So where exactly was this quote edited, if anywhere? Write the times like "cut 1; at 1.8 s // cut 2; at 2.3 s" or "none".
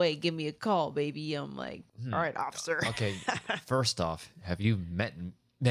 cut 1; at 1.9 s